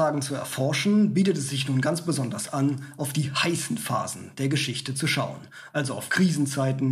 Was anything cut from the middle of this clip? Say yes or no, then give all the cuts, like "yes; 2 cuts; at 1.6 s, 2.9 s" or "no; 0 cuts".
no; 0 cuts